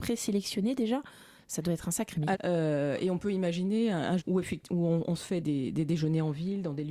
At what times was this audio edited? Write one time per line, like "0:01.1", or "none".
0:02.3
0:04.2
0:05.4